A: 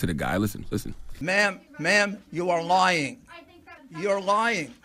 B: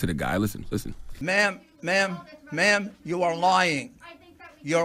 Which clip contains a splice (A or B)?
A